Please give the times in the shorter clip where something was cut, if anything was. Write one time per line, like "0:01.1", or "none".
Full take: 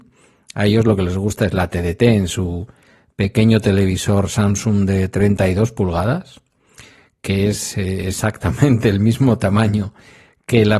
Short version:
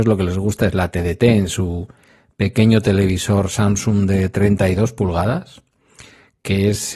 none